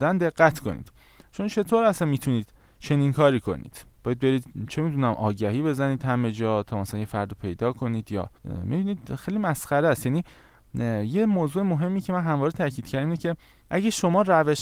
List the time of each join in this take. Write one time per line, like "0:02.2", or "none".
0:03.9
0:08.4